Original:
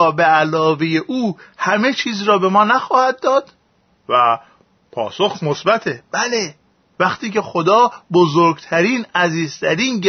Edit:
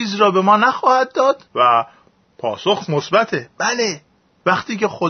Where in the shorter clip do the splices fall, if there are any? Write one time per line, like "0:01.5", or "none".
0:01.5